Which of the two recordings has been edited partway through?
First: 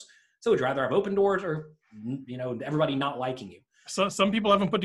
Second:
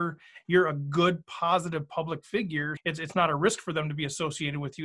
second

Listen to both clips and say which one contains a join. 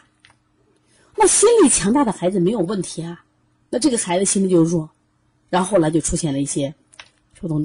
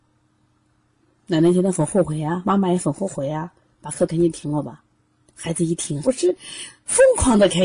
second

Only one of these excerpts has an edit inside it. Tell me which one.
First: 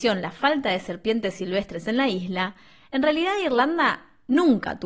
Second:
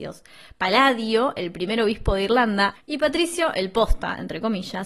second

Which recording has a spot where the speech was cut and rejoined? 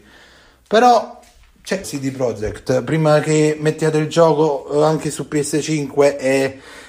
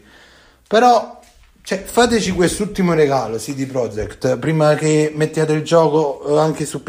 first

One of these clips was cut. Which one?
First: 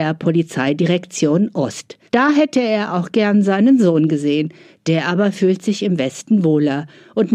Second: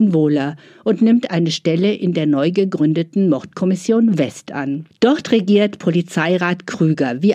first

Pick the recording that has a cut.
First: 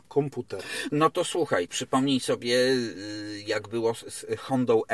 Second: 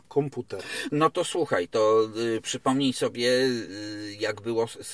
first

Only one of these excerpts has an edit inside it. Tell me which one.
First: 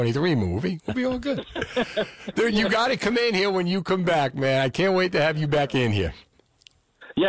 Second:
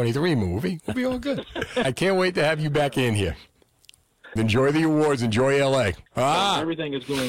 second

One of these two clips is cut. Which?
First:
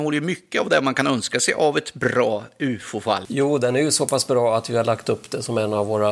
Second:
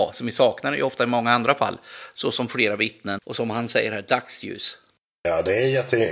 second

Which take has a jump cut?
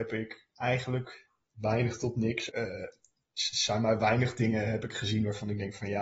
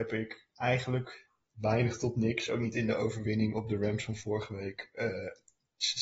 first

